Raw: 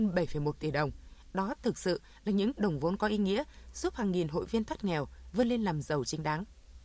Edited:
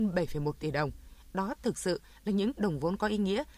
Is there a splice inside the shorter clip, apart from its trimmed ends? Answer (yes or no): no